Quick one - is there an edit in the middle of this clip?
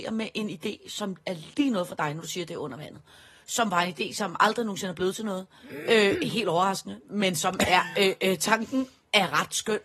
no; 0 cuts

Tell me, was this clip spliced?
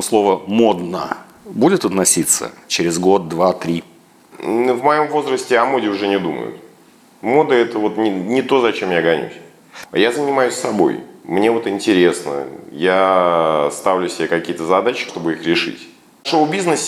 yes; 2 cuts; at 9.8 s, 15.1 s

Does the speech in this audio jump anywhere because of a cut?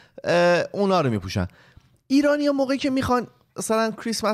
no; 0 cuts

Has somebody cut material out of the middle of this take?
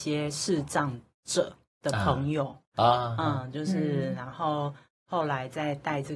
no; 0 cuts

